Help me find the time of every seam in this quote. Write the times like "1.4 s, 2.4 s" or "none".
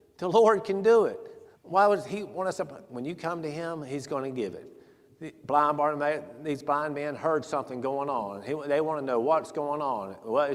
1.6 s